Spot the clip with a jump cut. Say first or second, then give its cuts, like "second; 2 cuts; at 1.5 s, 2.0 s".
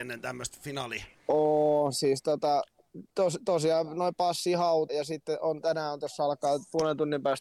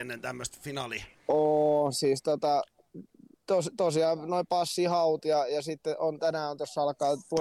first; 2 cuts; at 3.1 s, 4.9 s